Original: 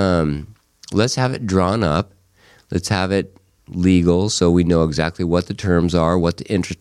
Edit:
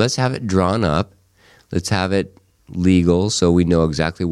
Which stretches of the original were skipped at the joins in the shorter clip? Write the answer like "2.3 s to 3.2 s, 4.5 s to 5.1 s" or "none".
none